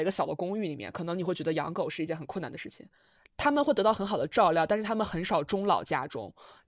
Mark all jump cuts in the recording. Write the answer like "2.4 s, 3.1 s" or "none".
3.2 s

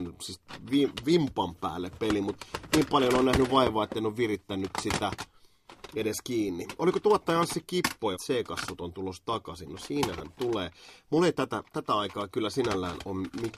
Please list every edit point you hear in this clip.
8.1 s

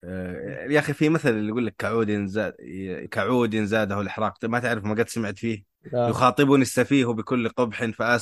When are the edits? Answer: 3.1 s, 5.8 s

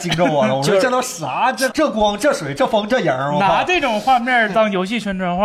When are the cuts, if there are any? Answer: 1.7 s

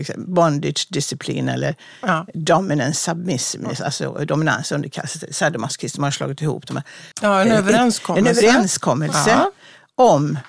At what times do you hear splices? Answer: 7.1 s

